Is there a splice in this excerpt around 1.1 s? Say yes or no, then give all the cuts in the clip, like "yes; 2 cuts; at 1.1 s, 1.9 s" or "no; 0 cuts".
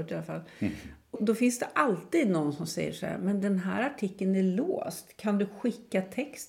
yes; 1 cut; at 1.1 s